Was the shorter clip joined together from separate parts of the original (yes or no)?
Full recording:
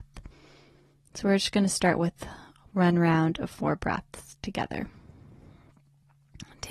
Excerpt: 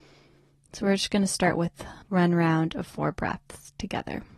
yes